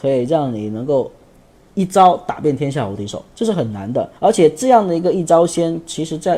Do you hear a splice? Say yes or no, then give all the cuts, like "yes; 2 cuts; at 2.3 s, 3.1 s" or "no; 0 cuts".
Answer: yes; 1 cut; at 4.2 s